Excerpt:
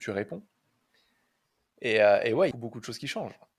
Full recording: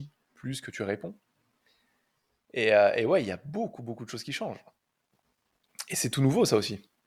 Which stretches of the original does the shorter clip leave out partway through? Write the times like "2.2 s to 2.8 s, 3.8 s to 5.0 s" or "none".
3.2 s to 3.8 s